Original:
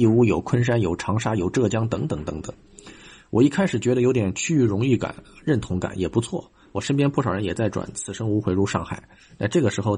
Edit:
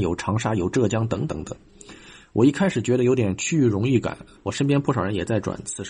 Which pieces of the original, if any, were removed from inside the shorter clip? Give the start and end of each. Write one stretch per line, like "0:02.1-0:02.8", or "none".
0:02.1-0:02.3
0:05.3-0:06.6